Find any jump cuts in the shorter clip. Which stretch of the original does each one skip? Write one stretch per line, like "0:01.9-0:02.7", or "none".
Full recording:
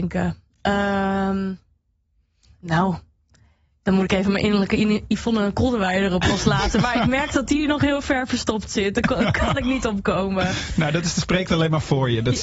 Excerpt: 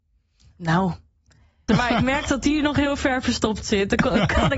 0:03.7-0:06.7